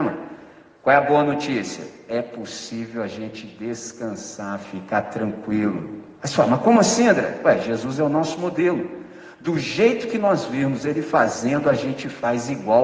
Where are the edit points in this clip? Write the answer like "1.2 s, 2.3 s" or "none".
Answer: none